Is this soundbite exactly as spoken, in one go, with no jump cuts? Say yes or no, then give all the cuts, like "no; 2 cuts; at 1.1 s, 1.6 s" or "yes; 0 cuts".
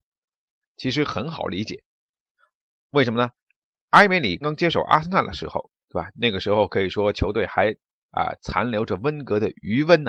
no; 1 cut; at 4.4 s